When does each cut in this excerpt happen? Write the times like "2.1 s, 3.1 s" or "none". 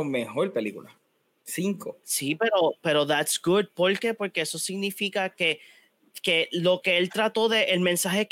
none